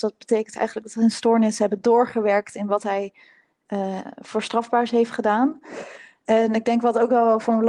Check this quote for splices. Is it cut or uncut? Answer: uncut